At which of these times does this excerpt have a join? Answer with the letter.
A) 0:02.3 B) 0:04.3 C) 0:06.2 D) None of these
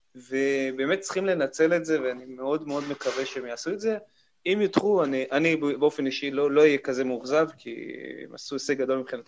D